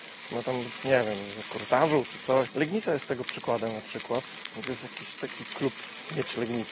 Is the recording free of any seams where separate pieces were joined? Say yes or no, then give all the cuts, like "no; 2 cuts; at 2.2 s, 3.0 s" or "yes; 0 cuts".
no; 1 cut; at 2.5 s